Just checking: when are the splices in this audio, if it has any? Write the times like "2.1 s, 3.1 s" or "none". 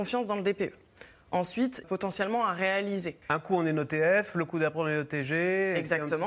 1.8 s, 3.2 s